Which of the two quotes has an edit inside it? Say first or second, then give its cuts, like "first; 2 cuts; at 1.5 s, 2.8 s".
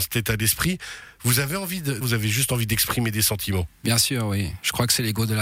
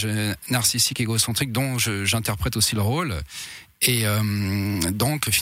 first; 1 cut; at 2.0 s